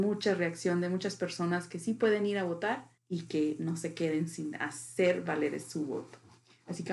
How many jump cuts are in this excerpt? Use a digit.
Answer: 1